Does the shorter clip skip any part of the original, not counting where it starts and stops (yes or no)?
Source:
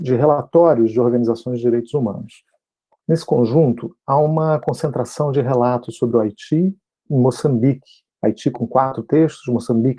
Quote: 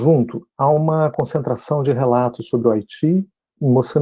no